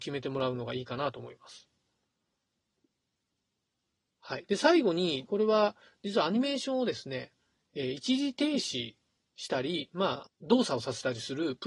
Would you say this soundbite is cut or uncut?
cut